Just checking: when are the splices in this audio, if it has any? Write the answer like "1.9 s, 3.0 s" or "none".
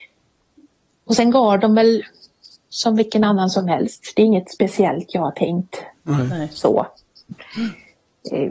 7.3 s